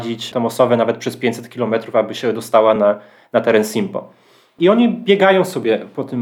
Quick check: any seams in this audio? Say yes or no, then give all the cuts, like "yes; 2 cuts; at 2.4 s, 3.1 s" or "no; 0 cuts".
no; 0 cuts